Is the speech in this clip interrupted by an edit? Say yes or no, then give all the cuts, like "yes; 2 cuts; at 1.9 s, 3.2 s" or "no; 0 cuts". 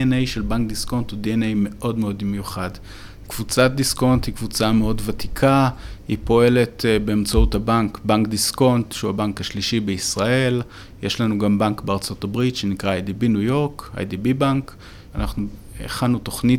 yes; 2 cuts; at 3.3 s, 15.1 s